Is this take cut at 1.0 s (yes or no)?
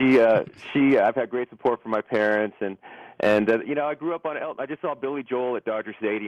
no